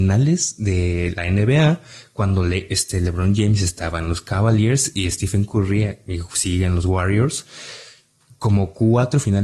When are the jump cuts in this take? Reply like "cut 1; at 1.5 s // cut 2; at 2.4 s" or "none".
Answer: none